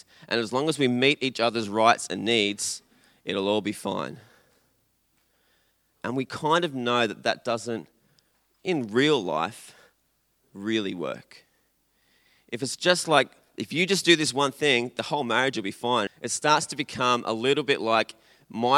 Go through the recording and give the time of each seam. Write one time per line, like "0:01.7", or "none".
0:16.1